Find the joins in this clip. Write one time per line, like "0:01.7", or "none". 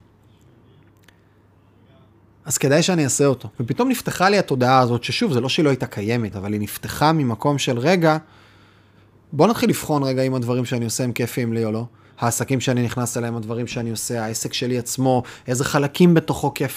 0:03.5
0:06.3